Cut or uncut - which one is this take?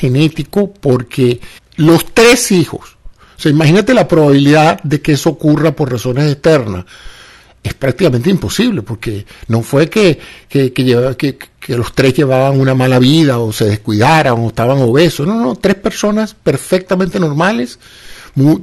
cut